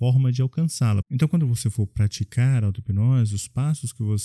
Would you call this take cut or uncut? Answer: cut